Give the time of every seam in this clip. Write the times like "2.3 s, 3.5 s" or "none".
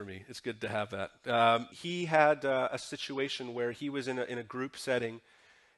1.7 s